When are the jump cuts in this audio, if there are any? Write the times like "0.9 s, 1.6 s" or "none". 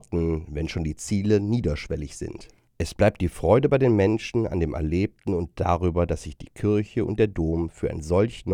2.7 s